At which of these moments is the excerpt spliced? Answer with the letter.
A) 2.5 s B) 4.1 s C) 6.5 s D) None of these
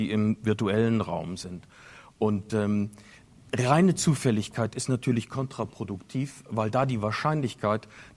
D